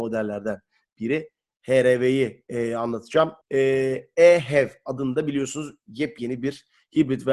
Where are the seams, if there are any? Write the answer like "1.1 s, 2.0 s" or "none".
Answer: 3.4 s

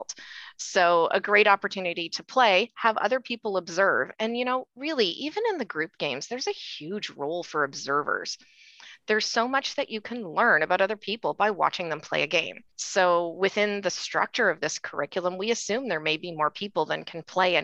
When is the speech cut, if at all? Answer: 12.7 s

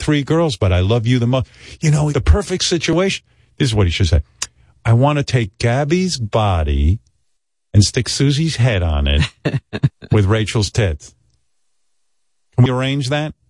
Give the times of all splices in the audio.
2.1 s

